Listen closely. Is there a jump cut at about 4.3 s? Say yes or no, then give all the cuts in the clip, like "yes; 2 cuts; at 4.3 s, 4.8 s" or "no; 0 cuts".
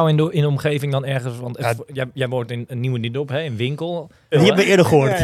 yes; 1 cut; at 4.3 s